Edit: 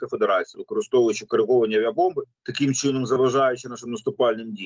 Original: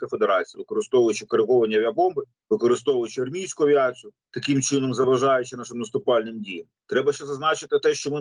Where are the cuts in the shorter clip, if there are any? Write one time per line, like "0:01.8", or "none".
0:02.3